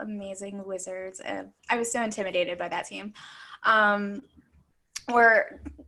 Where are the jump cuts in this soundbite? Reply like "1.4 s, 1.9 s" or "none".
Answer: 1.6 s